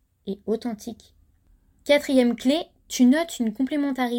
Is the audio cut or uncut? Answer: uncut